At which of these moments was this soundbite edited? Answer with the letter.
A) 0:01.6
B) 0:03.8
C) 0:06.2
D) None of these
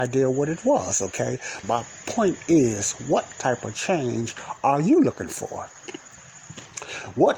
A